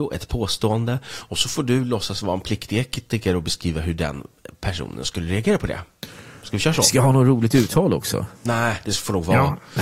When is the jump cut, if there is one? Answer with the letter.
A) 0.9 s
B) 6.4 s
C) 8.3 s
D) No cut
C